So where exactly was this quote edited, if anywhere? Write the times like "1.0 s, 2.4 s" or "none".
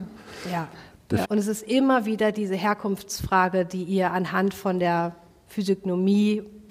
1.2 s